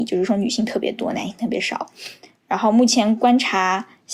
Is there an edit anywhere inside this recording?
no; 0 cuts

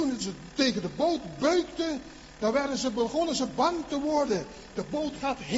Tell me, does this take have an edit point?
no; 0 cuts

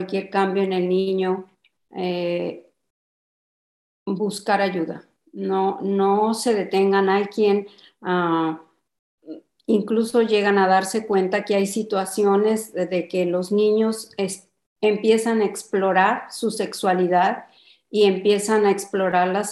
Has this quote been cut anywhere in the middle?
no; 0 cuts

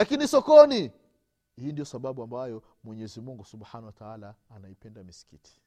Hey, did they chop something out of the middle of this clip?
no; 0 cuts

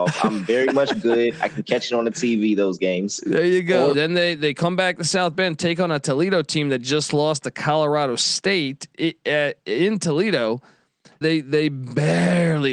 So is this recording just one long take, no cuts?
no; 2 cuts; at 3.9 s, 11.2 s

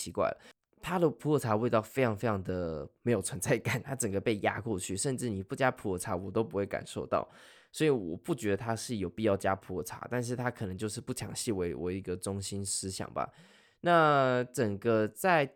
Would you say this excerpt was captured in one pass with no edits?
yes; 0 cuts

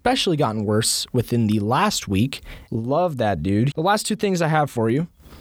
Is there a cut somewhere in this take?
yes; 2 cuts; at 2.7 s, 3.7 s

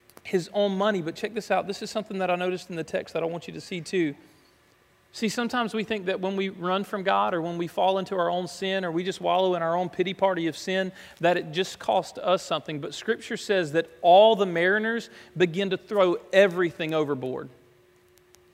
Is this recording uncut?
no; 1 cut; at 5.1 s

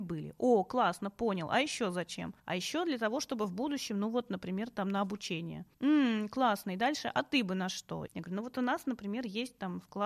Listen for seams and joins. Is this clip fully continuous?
no; 2 cuts; at 5.7 s, 8.1 s

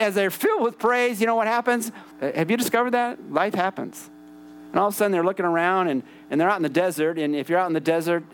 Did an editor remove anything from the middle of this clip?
yes; 1 cut; at 2.1 s

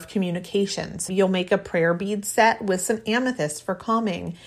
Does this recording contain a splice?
yes; 1 cut; at 1.1 s

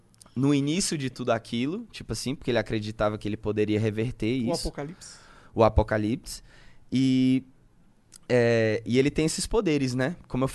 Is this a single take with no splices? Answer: yes; 0 cuts

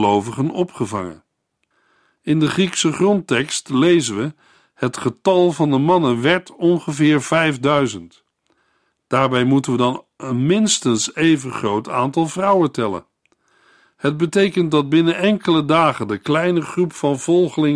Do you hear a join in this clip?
no; 0 cuts

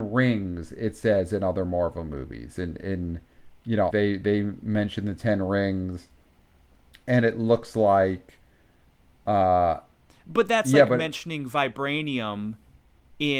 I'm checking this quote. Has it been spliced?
yes; 1 cut; at 3.9 s

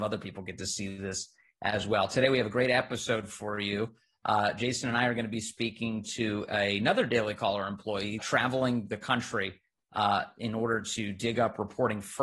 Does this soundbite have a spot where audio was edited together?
yes; 1 cut; at 8.2 s

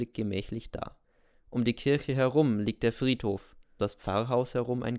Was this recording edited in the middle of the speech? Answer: yes; 1 cut; at 3.8 s

